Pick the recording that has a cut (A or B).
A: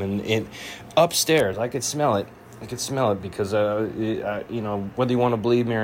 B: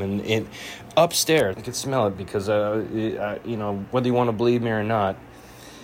B